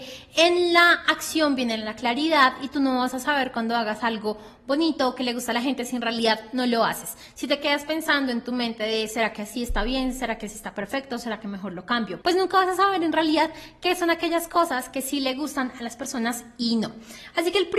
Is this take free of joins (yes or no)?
no